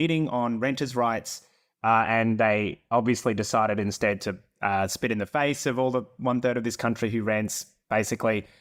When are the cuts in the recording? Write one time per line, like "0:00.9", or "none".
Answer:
none